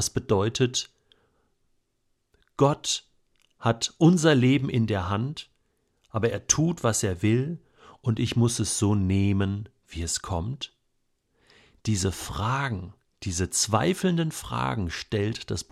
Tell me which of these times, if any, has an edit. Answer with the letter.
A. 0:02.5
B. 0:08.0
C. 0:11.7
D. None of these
D